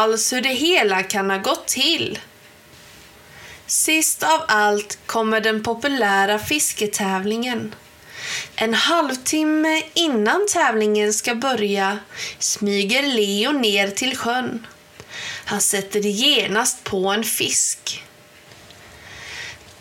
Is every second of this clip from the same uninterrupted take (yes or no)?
no